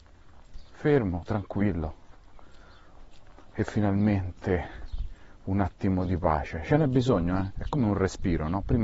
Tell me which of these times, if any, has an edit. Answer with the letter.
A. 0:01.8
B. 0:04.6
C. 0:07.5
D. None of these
C